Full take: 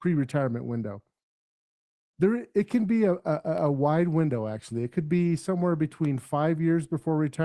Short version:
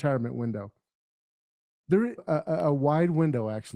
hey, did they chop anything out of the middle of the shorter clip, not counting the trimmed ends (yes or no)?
yes